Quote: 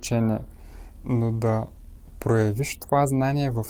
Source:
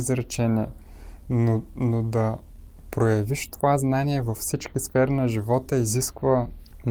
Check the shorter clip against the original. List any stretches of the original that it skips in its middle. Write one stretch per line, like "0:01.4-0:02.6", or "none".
0:01.2-0:01.7